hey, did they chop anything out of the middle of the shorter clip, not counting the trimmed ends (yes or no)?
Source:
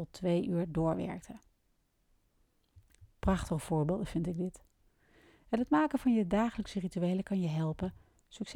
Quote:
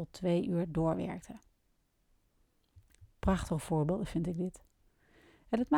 no